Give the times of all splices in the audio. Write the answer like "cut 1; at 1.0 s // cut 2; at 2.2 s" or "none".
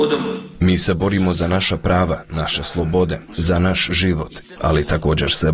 cut 1; at 3.3 s // cut 2; at 4.6 s